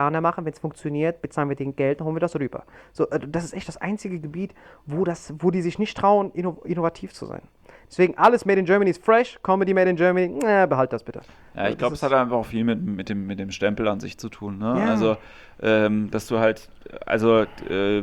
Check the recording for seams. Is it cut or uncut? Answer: uncut